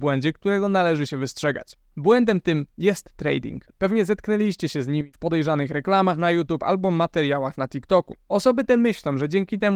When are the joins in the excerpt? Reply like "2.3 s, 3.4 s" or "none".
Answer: 8.3 s